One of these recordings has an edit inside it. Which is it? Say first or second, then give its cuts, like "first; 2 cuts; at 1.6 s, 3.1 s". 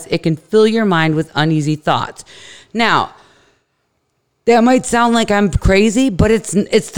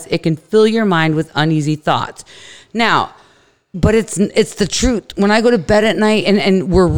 second; 1 cut; at 3.7 s